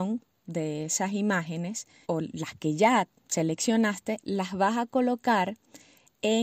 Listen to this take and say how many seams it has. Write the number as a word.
one